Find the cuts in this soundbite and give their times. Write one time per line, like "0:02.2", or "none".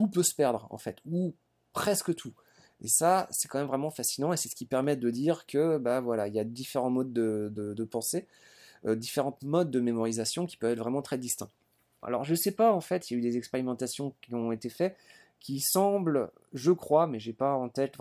0:12.0